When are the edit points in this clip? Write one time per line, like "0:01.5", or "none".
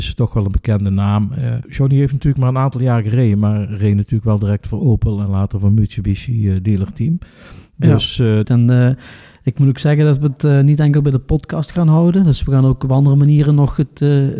0:08.4